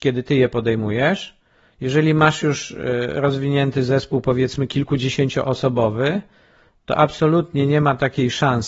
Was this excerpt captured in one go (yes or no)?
yes